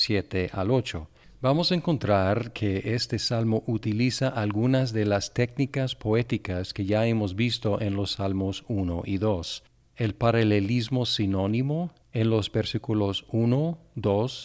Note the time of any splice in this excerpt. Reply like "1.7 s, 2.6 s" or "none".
none